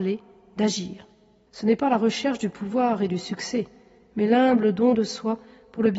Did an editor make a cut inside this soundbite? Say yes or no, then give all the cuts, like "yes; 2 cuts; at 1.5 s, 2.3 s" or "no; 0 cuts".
yes; 1 cut; at 1.5 s